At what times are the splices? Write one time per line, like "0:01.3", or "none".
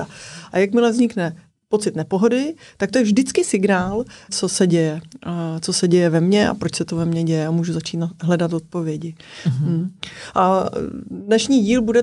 0:04.3